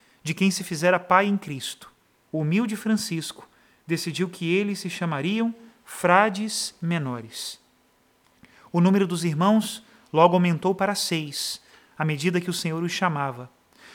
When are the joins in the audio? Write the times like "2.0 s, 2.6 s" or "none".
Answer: 2.3 s

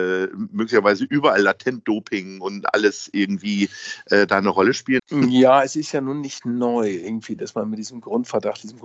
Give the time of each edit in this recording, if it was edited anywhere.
5.0 s

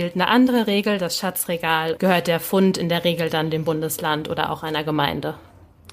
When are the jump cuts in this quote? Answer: 2.0 s

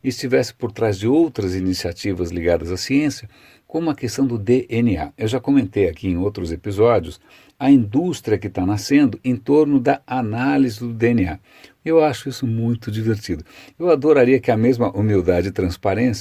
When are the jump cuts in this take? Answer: 11.8 s

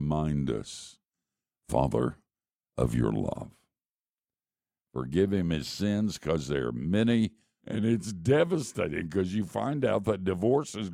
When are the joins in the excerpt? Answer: 4.8 s, 7.6 s

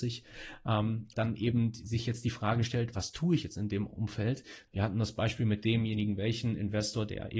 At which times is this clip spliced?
1.1 s, 4.7 s

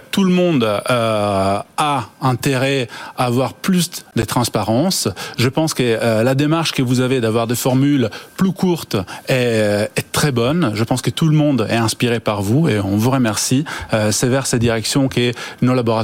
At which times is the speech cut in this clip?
none

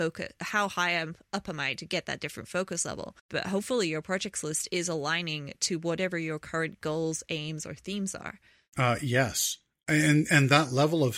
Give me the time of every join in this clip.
3.2 s, 8.7 s

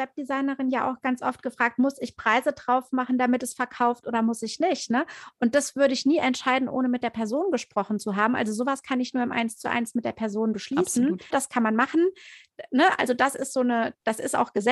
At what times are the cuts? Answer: 11.3 s

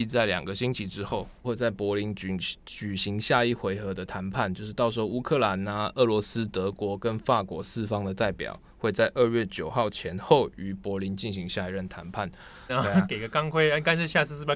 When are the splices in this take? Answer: 1.4 s, 12.7 s

